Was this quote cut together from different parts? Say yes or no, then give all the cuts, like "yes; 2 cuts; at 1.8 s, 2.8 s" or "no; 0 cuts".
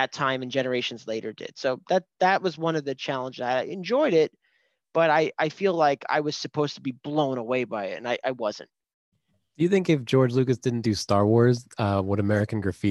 no; 0 cuts